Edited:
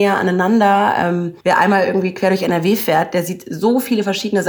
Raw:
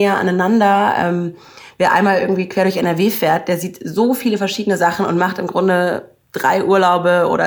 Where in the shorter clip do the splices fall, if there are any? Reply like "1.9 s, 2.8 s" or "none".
1.4 s